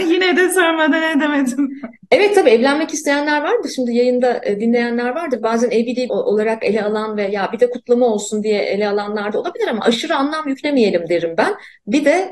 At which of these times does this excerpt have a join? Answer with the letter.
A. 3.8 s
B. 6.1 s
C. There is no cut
B